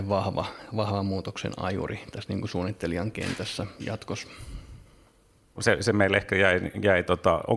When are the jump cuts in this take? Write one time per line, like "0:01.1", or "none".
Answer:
0:05.6